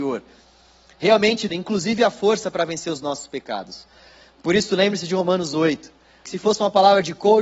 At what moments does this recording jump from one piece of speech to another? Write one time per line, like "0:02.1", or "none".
0:01.5
0:06.2

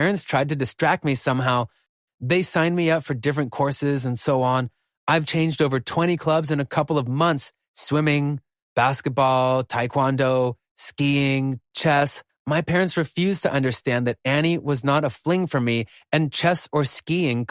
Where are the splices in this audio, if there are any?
0:08.7
0:12.3

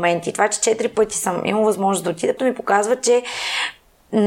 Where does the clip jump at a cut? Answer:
0:02.4

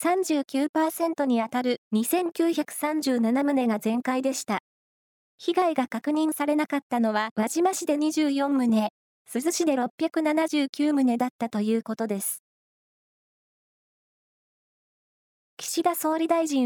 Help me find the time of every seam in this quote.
0:07.3

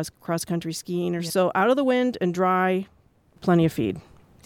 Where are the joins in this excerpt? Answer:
0:01.3

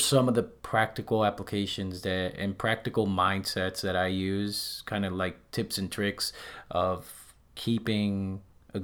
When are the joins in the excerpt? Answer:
none

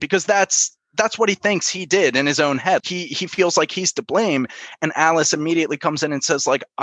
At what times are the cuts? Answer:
0:02.8

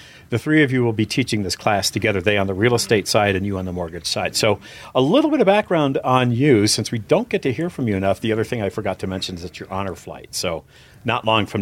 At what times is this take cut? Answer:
none

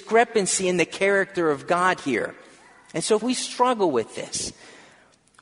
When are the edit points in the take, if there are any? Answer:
0:03.2

